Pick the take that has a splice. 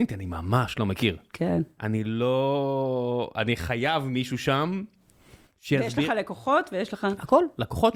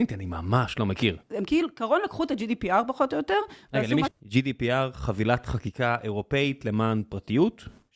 second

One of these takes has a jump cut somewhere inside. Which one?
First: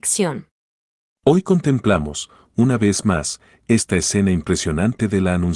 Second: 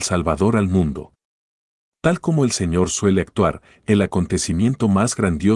first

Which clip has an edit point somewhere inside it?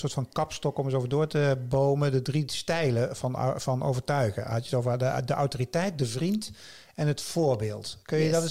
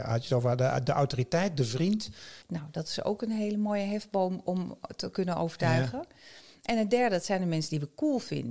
second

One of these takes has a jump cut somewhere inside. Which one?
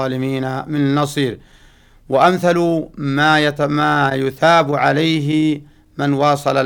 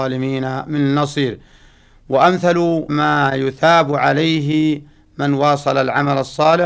second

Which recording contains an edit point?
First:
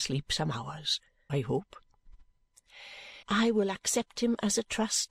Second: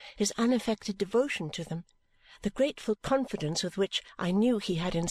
first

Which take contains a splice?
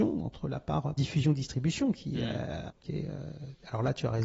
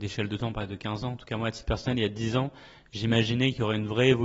first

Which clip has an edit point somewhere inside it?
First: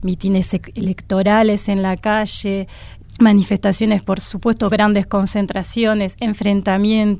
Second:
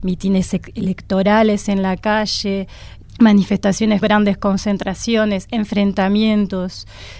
second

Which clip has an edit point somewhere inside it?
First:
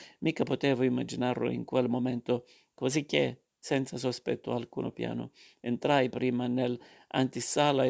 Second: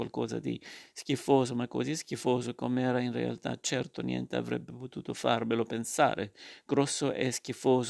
first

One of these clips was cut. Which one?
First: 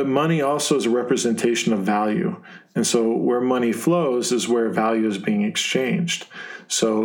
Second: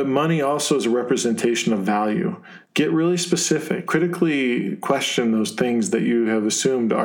second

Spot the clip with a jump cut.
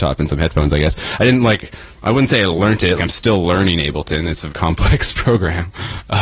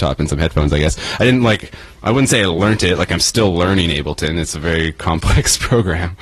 first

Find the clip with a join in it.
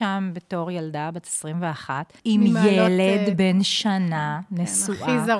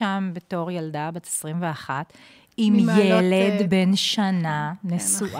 first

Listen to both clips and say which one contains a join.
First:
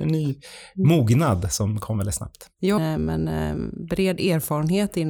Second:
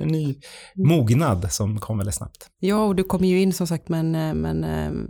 first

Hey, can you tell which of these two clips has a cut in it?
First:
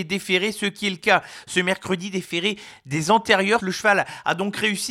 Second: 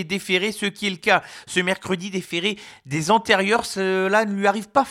first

